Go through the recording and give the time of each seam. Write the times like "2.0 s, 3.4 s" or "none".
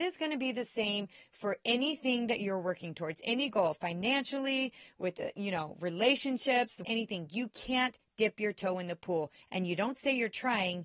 6.8 s, 9.4 s